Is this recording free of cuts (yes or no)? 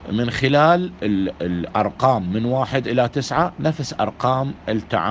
no